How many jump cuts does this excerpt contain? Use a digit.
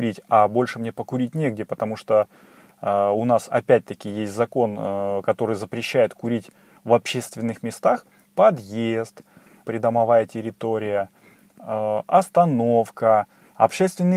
2